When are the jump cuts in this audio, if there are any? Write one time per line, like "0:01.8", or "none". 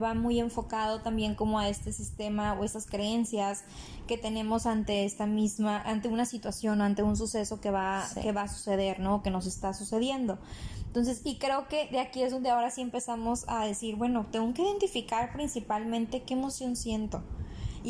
none